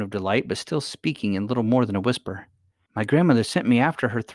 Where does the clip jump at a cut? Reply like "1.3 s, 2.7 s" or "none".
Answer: 2.9 s